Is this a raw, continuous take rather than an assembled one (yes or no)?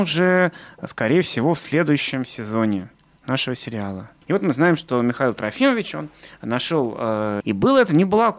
no